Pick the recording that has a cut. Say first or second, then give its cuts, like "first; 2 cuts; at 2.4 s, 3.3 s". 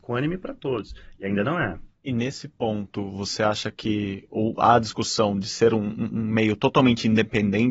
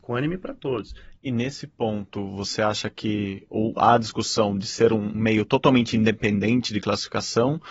second; 2 cuts; at 1.2 s, 5.1 s